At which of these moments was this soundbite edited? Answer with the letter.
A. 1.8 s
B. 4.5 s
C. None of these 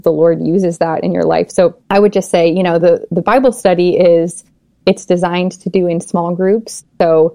A